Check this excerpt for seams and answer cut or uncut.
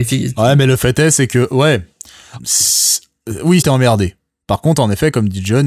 cut